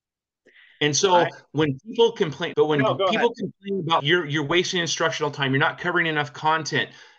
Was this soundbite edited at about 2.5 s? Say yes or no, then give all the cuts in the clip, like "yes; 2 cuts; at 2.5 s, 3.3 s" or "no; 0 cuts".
yes; 2 cuts; at 2.5 s, 4.0 s